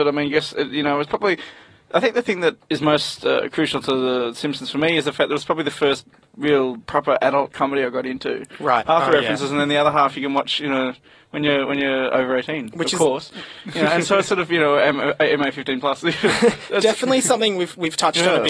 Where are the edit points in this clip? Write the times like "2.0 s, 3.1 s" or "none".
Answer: 8.8 s